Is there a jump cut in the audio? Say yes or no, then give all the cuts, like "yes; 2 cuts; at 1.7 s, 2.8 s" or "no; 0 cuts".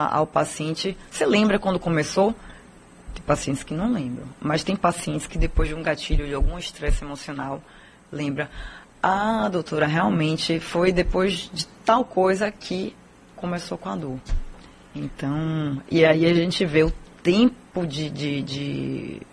no; 0 cuts